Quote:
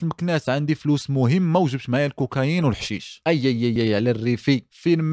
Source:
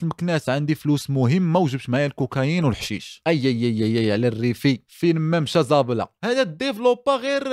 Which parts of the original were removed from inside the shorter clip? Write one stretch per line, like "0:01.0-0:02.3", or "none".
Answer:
0:03.8-0:03.9